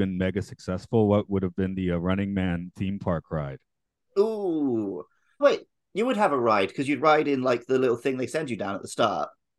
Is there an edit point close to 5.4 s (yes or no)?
yes